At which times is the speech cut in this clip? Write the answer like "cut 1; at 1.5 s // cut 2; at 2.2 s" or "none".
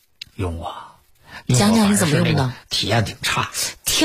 none